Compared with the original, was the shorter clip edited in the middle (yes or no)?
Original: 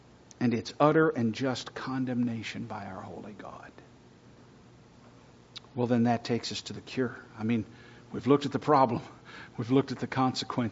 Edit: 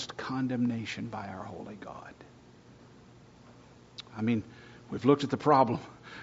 yes